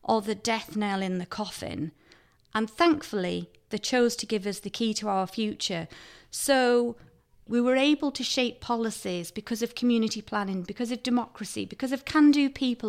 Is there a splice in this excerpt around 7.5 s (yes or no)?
yes